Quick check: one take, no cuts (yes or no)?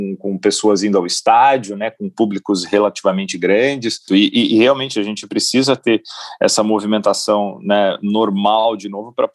no